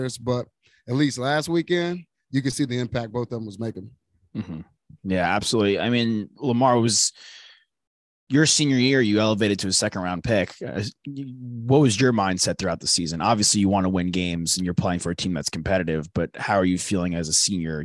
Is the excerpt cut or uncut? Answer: uncut